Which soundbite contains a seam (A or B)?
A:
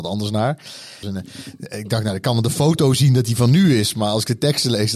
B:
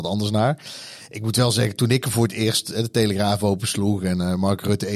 A